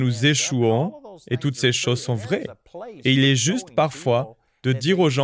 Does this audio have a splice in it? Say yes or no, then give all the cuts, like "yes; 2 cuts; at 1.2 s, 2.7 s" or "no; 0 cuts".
no; 0 cuts